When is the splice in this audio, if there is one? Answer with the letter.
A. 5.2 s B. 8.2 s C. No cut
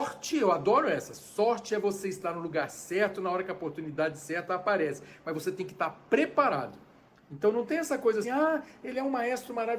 B